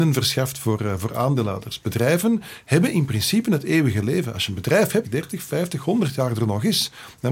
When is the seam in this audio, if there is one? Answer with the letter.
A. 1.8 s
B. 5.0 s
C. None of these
B